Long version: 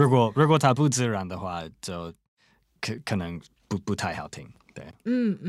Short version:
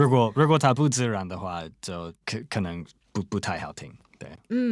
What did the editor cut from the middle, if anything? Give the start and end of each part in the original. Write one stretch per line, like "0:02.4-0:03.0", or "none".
0:02.2-0:02.8